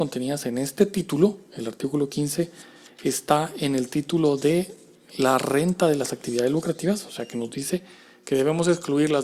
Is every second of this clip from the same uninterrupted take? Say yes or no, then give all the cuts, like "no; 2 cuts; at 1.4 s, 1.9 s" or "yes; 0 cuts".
yes; 0 cuts